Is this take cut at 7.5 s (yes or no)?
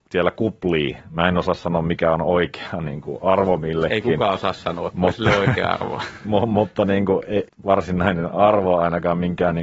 yes